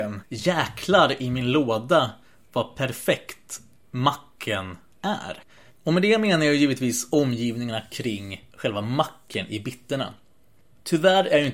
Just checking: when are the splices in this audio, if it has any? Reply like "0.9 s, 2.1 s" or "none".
5.7 s, 8.5 s